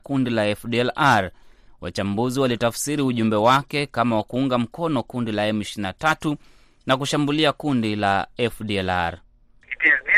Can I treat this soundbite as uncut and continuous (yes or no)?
yes